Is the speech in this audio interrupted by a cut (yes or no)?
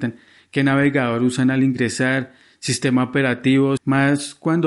yes